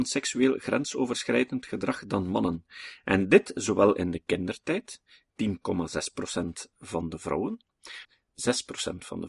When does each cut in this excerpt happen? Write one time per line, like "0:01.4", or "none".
0:08.0